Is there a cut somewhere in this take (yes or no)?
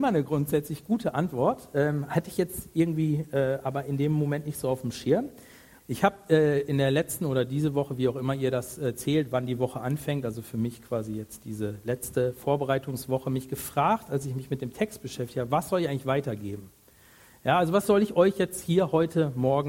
yes